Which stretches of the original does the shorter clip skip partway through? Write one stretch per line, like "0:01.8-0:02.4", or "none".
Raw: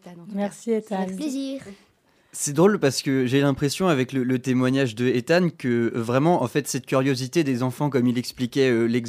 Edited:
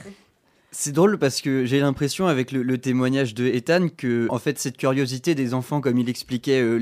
0:05.9-0:06.4